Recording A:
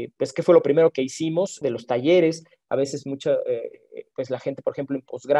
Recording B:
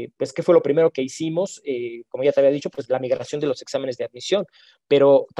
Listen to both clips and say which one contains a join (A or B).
A